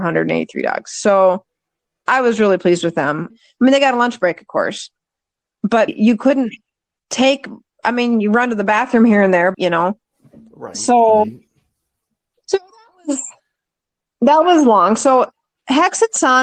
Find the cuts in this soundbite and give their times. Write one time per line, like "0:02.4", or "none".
0:03.3
0:05.9
0:09.5